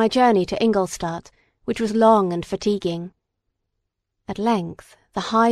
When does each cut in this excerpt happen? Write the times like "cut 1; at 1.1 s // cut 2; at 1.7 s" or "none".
none